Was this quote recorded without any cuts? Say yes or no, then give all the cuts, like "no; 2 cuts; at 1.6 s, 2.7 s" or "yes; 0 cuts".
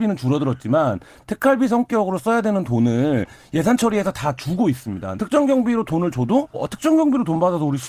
no; 2 cuts; at 5.2 s, 6.5 s